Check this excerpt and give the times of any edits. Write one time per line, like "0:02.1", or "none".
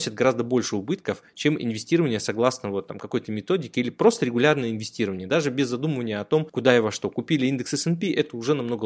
none

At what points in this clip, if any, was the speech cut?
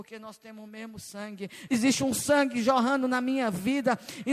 0:01.7

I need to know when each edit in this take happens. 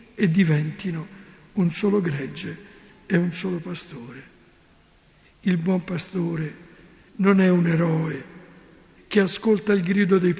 0:07.1
0:09.0

